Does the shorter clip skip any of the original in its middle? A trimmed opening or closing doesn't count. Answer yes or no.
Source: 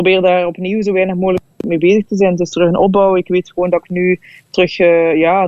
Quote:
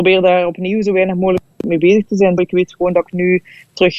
yes